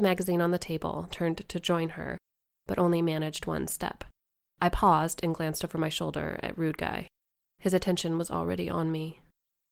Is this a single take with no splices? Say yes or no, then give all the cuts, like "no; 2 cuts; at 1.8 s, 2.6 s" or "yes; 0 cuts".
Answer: no; 1 cut; at 1.1 s